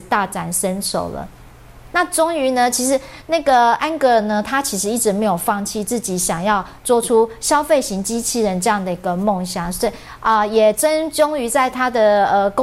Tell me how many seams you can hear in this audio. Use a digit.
1